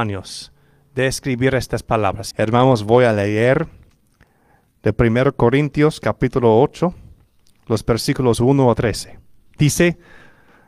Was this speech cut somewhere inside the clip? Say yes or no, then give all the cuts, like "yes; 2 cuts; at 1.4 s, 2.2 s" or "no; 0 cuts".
yes; 1 cut; at 2.3 s